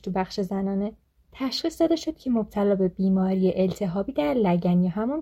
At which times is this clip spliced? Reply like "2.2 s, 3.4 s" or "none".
1.2 s